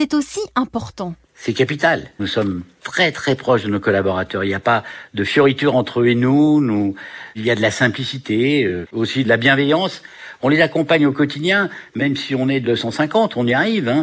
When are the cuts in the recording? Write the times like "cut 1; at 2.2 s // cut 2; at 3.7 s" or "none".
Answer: cut 1; at 2.2 s